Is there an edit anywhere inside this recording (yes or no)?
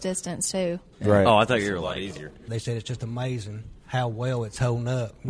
yes